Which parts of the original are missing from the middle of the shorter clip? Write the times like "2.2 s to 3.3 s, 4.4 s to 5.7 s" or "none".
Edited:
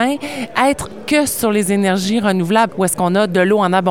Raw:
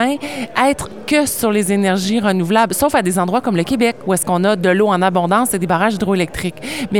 2.7 s to 4.0 s